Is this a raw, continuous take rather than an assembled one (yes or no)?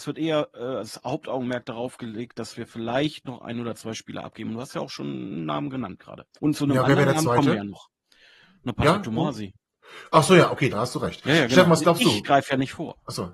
no